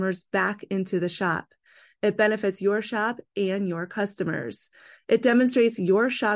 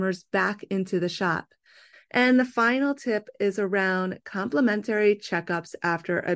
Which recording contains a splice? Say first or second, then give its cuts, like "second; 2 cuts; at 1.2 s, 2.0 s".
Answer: second; 1 cut; at 1.9 s